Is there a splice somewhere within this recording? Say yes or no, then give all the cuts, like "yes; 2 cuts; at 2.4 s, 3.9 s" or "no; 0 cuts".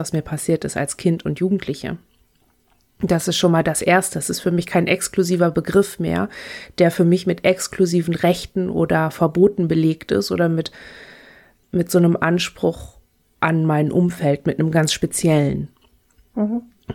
no; 0 cuts